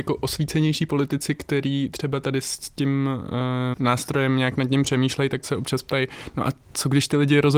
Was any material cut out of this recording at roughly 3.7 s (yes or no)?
yes